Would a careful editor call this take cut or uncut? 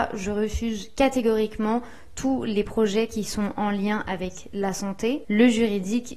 cut